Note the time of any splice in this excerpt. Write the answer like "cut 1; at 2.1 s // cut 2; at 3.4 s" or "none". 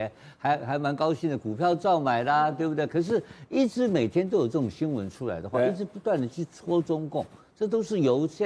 cut 1; at 2.9 s